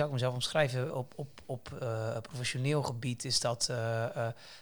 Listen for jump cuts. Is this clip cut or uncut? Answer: cut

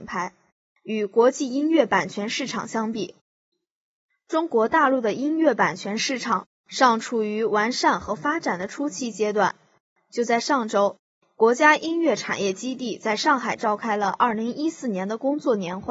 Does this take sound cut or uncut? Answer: uncut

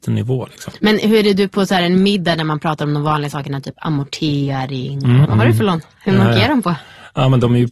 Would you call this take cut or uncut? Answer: cut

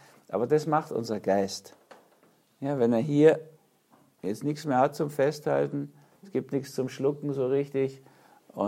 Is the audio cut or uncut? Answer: uncut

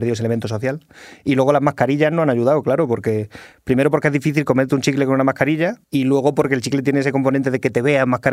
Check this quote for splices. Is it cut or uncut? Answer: cut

